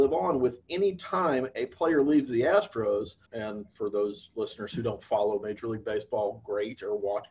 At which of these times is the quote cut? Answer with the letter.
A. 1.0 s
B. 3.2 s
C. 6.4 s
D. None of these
B